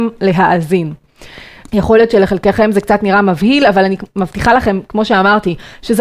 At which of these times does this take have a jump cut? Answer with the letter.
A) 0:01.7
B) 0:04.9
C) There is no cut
A